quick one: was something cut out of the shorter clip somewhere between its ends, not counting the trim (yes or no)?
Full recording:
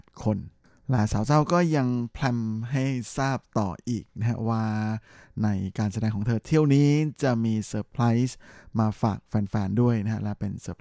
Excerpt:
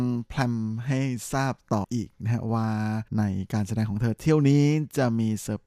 yes